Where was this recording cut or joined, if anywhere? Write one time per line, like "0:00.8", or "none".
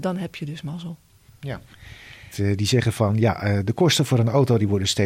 0:02.3